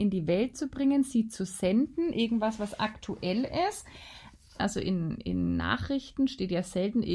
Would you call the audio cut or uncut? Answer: cut